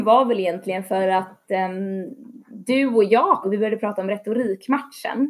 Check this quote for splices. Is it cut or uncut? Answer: cut